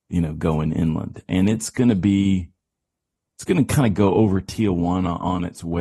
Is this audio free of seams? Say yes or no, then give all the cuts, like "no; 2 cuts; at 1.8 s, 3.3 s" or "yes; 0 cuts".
yes; 0 cuts